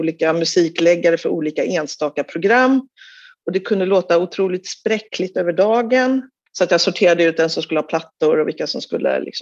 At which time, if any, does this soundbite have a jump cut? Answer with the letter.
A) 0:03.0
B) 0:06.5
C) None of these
B